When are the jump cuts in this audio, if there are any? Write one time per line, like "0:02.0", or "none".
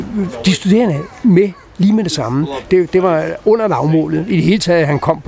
0:02.7